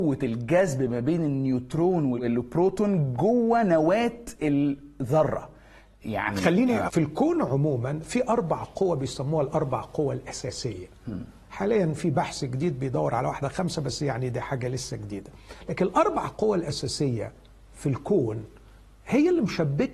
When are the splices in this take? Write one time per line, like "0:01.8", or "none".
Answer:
0:06.9